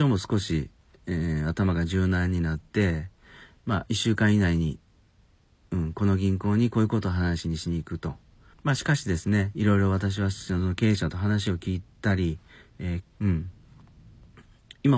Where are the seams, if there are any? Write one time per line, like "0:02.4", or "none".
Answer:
0:08.5
0:13.0